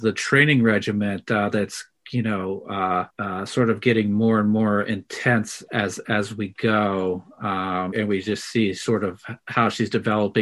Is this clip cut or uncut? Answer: cut